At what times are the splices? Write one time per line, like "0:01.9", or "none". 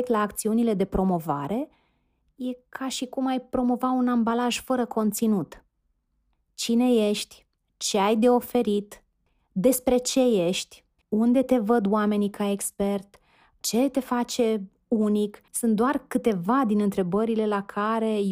0:11.0
0:15.5